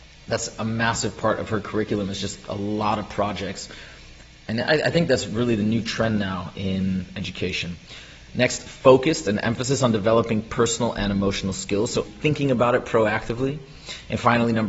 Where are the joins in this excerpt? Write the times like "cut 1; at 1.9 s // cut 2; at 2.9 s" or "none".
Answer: cut 1; at 12.0 s